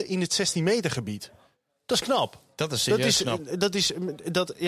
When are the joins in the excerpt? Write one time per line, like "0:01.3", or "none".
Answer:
none